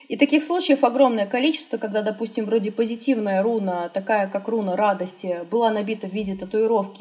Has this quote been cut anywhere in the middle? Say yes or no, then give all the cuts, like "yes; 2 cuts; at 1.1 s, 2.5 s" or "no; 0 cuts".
no; 0 cuts